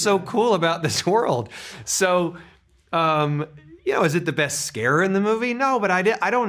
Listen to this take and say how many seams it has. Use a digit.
0